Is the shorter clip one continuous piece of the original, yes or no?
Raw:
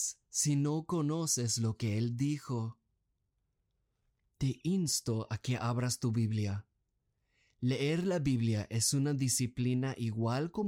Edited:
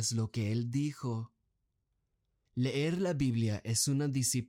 no